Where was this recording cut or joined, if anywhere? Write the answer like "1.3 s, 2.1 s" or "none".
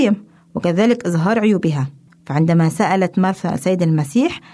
none